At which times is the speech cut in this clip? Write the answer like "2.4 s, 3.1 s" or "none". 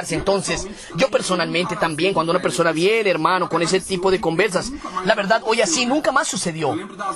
none